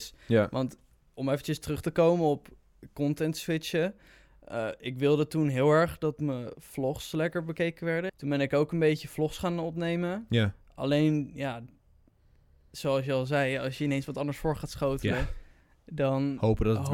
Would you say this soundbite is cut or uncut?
cut